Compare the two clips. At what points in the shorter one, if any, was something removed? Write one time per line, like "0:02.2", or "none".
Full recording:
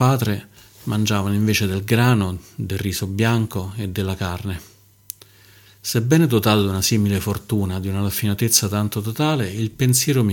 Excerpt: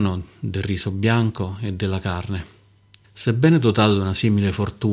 0:03.0